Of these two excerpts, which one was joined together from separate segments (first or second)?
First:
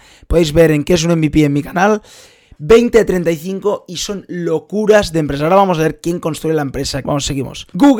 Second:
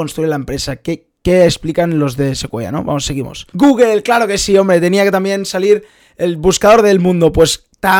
first